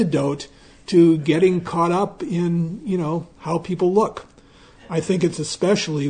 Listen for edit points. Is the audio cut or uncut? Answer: uncut